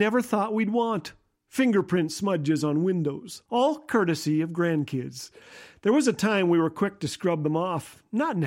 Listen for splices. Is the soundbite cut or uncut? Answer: cut